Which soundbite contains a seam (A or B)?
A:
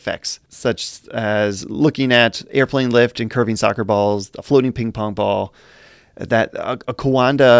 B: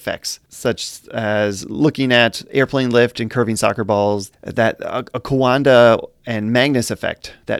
B